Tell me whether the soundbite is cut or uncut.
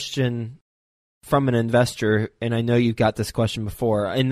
uncut